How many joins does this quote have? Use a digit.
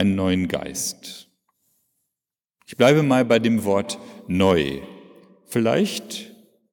0